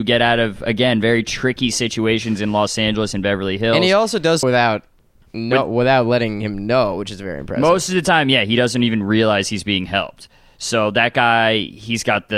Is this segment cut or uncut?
cut